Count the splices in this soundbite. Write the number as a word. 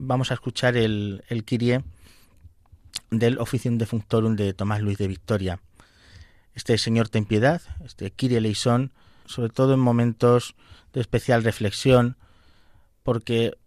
one